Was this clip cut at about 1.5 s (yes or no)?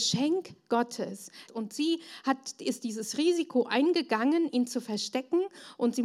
yes